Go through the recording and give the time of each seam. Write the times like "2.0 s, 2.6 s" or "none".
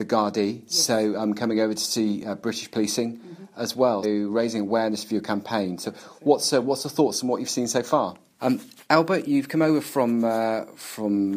4.0 s, 8.4 s